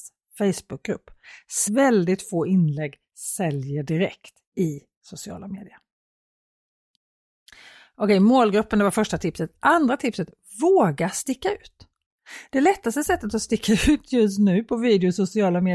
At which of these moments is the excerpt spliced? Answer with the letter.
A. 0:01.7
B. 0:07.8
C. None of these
A